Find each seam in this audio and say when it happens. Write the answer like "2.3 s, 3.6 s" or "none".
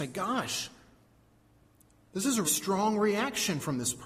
2.4 s